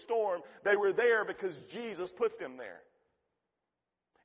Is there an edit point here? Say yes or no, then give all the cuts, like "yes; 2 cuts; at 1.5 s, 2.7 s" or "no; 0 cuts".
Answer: no; 0 cuts